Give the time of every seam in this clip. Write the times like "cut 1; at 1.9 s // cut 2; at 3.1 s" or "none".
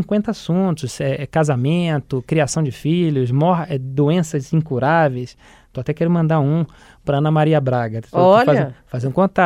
none